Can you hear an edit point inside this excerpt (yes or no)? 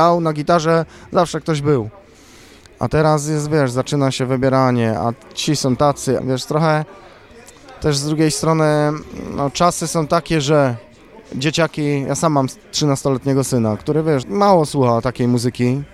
yes